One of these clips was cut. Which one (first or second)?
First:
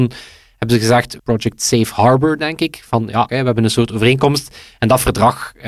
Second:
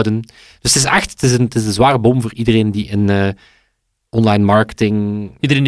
first